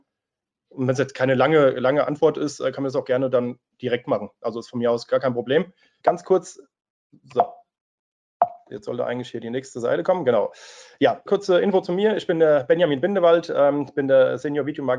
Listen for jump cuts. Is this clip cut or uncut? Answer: cut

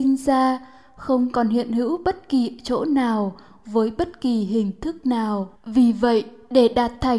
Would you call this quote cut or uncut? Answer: cut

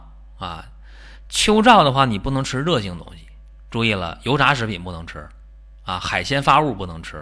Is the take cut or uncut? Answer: uncut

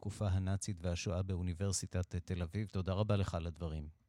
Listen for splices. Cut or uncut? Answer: uncut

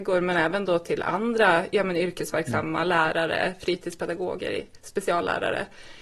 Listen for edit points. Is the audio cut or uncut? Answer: uncut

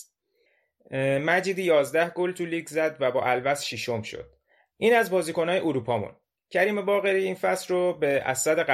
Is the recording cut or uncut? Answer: cut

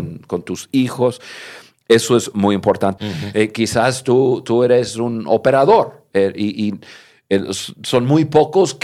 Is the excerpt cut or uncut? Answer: cut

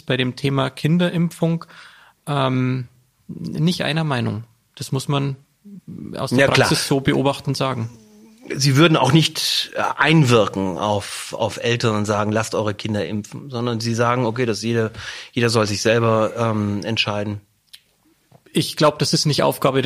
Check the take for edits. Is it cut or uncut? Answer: uncut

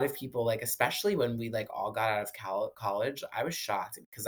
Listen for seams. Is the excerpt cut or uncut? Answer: uncut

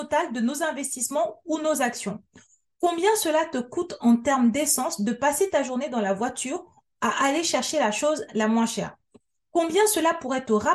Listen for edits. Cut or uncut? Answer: uncut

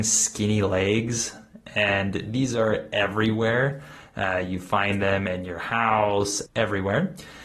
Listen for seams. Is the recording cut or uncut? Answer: cut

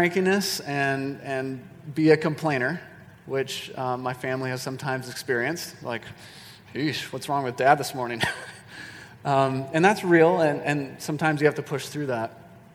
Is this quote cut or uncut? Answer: uncut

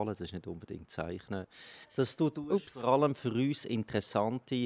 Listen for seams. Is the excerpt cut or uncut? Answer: cut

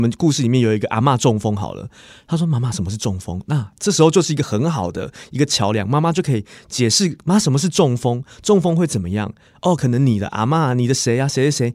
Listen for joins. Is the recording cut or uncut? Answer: uncut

